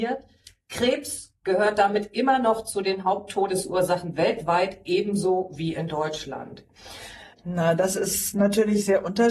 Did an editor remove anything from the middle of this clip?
yes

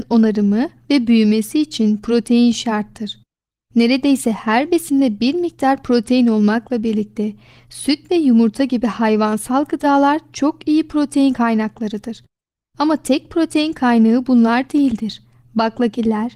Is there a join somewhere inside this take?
no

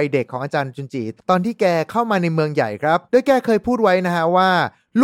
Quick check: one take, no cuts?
no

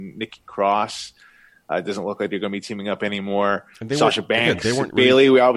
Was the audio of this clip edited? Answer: no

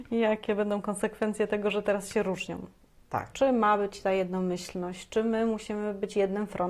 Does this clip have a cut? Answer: yes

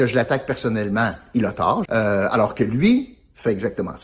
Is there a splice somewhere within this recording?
yes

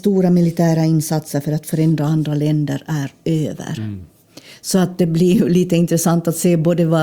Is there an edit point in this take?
no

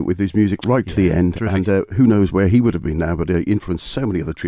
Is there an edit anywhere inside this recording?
no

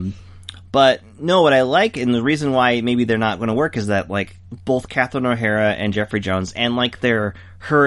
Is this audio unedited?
yes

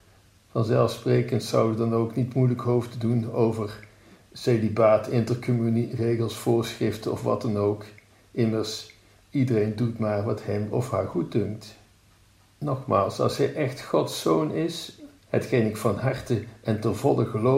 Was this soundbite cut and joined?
no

